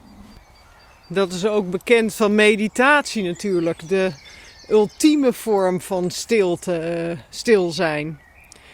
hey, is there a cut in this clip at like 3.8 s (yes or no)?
no